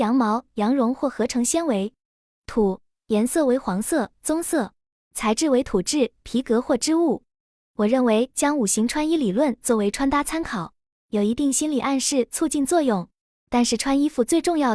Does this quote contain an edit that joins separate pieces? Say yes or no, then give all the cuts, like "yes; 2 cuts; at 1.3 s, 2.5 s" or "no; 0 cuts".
no; 0 cuts